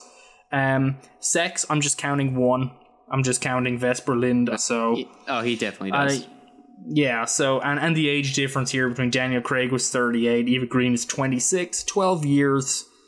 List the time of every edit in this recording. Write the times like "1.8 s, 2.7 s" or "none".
4.5 s